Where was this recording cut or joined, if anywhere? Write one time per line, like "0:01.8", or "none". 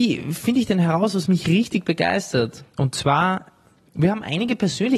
0:02.7